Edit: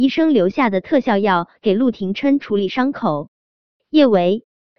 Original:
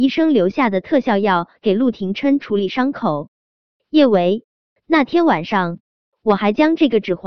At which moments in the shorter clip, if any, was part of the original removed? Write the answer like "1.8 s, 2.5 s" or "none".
none